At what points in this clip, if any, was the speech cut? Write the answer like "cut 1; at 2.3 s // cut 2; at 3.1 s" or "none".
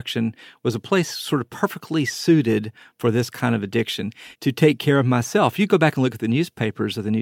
cut 1; at 4.3 s